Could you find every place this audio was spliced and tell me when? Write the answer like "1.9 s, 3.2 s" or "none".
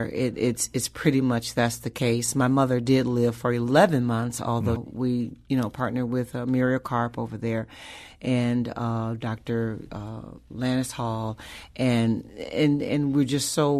4.8 s, 10.5 s